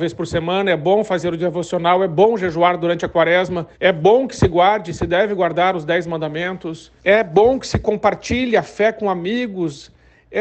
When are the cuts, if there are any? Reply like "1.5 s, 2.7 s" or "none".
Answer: 3.7 s, 7.0 s